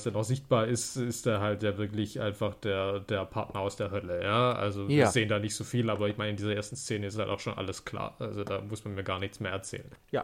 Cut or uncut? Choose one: uncut